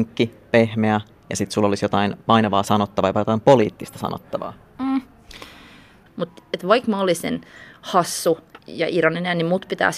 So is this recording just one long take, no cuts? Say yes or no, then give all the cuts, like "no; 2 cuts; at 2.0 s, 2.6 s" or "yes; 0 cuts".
no; 2 cuts; at 6.1 s, 8.6 s